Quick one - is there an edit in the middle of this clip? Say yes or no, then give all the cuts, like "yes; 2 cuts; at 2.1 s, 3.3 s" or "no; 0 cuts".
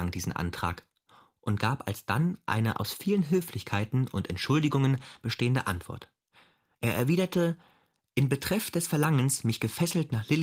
no; 0 cuts